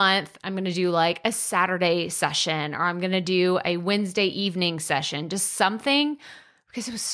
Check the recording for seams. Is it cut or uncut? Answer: uncut